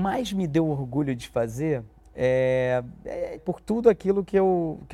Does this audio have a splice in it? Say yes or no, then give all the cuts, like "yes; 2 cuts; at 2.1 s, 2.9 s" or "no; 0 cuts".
yes; 1 cut; at 3.4 s